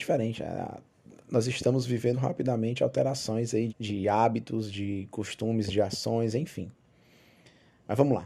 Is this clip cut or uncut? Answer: cut